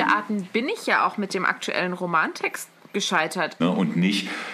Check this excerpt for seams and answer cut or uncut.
cut